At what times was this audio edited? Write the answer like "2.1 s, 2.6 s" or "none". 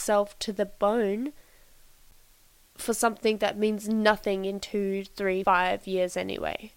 5.4 s